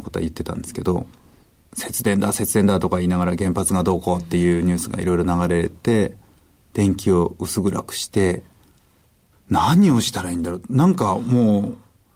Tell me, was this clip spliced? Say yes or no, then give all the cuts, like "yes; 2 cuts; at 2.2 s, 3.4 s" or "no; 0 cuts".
yes; 1 cut; at 1.6 s